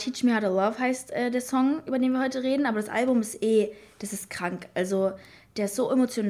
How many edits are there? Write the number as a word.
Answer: zero